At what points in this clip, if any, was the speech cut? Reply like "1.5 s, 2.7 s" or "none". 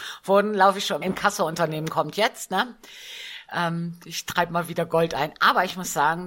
1.0 s